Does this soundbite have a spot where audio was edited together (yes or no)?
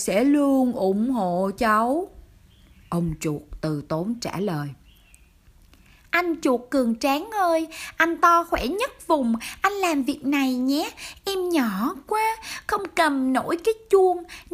no